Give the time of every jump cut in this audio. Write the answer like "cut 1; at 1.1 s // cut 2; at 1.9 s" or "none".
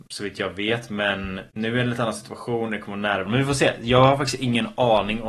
cut 1; at 1.5 s // cut 2; at 3.3 s